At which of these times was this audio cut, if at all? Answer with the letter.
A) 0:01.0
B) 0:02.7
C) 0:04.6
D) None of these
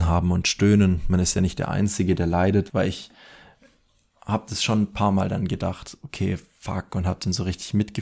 B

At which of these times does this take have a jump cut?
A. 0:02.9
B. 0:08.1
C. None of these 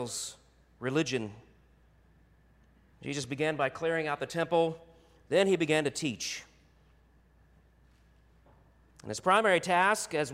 A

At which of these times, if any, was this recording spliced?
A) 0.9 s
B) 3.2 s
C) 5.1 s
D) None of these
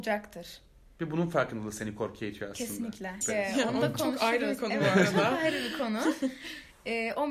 B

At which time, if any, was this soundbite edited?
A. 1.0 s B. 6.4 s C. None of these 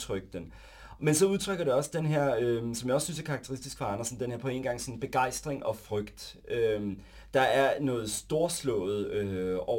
C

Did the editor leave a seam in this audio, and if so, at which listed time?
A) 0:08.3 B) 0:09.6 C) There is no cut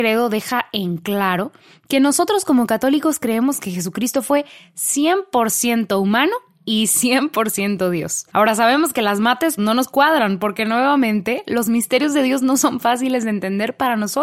B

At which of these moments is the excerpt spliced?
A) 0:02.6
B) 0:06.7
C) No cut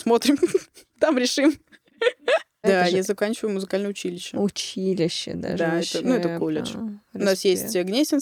A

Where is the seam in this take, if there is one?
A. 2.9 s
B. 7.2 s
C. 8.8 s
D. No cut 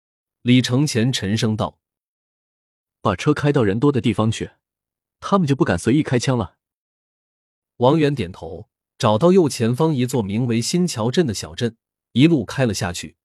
C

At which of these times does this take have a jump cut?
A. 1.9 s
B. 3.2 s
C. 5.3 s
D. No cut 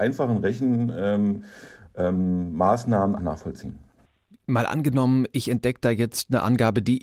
B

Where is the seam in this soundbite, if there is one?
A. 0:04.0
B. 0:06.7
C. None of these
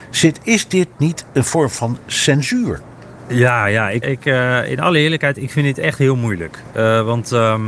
A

